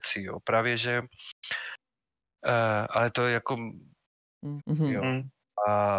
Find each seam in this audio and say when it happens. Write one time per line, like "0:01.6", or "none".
0:04.6